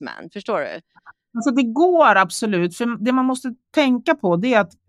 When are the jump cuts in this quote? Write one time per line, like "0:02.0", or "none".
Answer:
none